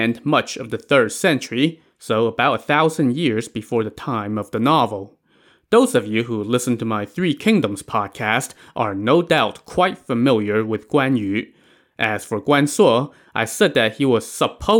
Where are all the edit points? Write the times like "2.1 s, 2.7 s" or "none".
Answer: none